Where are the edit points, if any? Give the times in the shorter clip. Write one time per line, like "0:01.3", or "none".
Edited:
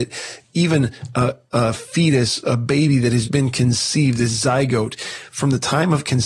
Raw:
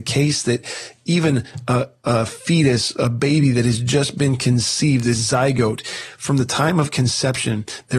0:03.2

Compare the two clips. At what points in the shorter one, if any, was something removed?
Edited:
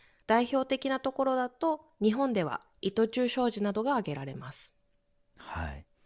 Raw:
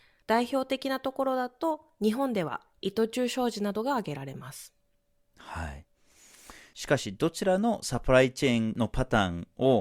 none

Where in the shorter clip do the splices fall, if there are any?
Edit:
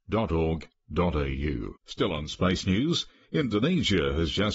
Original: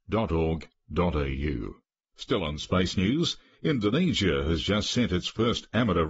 0:01.8

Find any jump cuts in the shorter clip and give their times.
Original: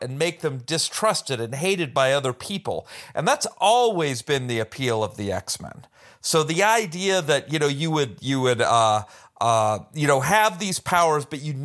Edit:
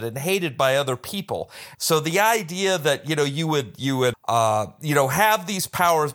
0:01.7
0:04.1

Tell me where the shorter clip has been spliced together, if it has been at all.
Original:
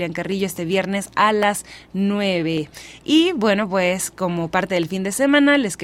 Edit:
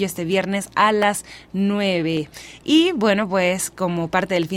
none

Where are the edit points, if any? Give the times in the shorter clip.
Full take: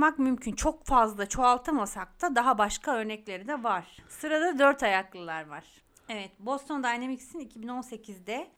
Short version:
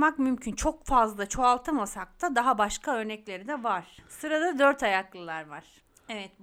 none

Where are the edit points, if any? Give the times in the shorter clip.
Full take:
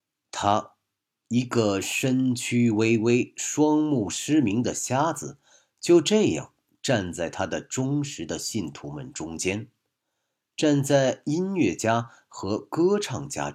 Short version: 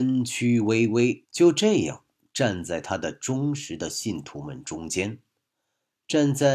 0:01.2

